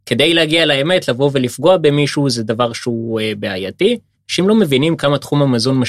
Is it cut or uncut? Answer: cut